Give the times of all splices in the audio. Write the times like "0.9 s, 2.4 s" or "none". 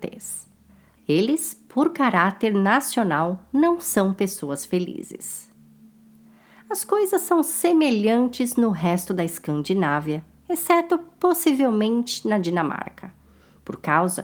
1.0 s